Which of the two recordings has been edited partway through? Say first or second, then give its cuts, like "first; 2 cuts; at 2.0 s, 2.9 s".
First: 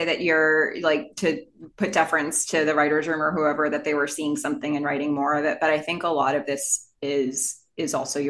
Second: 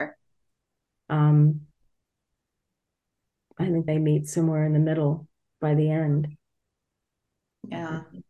second; 2 cuts; at 1.0 s, 3.9 s